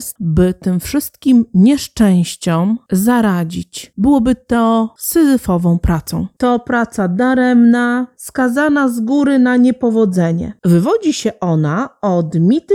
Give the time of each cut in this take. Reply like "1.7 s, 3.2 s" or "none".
6.3 s, 8.2 s